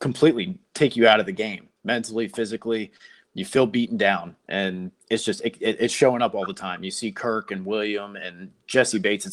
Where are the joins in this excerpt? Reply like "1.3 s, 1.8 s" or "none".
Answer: 5.0 s

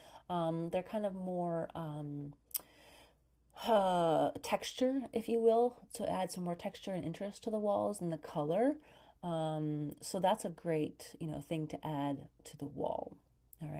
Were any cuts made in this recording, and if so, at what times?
none

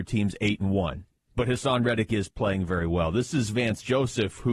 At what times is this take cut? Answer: none

